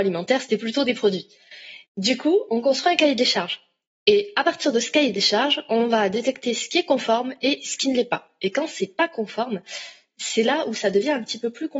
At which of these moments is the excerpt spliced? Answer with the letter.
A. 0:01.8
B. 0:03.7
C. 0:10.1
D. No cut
A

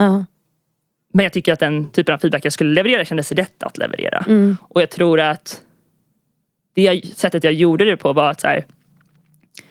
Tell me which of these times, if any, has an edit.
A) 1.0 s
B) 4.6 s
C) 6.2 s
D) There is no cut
D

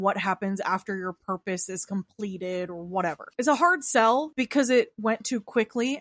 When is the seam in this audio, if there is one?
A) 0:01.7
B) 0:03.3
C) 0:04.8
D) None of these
B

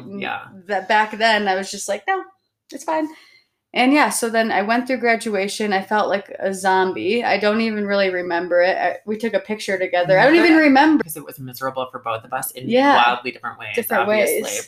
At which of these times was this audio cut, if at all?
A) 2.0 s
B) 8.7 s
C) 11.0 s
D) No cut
C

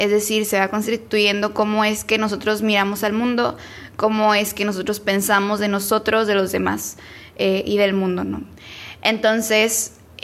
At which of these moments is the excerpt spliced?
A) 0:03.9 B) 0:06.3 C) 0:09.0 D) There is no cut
D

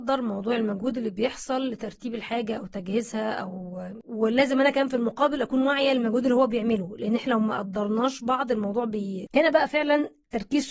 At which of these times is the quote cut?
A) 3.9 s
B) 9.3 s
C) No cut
B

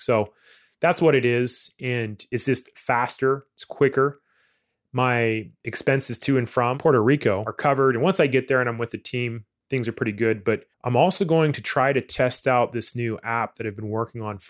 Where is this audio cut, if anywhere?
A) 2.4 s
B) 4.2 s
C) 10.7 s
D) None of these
C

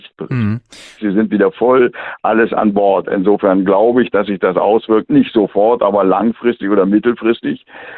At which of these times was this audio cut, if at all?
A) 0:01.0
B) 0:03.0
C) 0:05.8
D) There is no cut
A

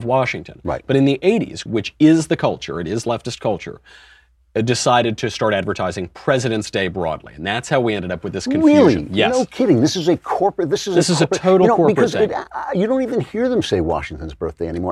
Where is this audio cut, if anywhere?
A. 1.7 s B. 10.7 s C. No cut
A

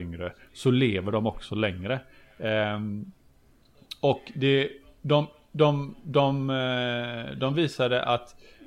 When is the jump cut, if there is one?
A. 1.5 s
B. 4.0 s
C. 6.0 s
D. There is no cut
D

